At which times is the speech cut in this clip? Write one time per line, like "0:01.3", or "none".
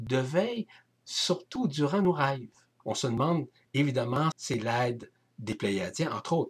0:02.8
0:04.3